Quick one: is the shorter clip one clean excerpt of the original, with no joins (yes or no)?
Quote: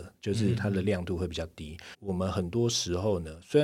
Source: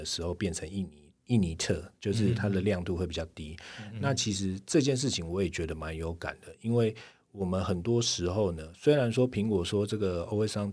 no